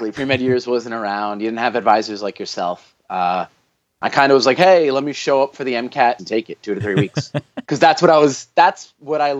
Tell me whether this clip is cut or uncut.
cut